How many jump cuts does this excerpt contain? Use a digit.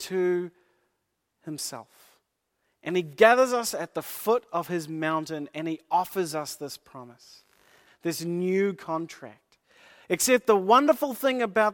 1